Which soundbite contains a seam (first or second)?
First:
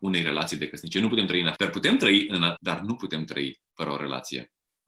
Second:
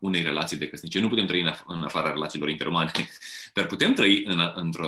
first